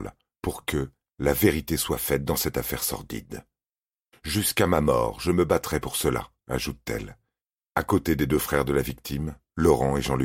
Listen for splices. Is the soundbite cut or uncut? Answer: uncut